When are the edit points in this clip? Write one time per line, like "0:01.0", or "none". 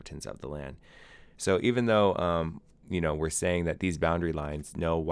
0:01.3